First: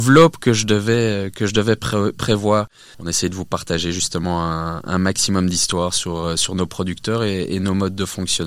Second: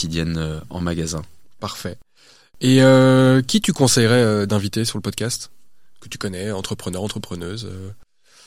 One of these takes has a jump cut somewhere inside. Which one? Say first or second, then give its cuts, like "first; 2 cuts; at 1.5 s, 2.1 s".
first; 1 cut; at 2.9 s